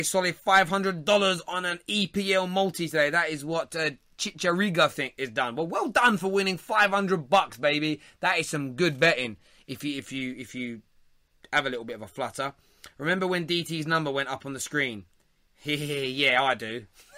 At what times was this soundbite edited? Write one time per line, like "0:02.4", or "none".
none